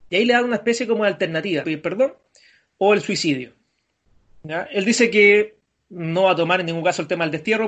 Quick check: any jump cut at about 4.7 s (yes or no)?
no